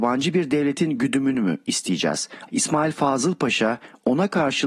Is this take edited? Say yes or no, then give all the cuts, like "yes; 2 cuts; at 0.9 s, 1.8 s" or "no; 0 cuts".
yes; 1 cut; at 2.5 s